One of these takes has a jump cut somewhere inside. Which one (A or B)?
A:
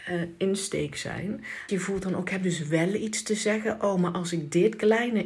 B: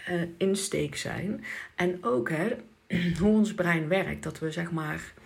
A